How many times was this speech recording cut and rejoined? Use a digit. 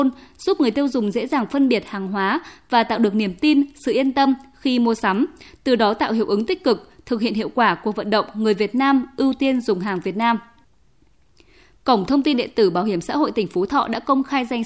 0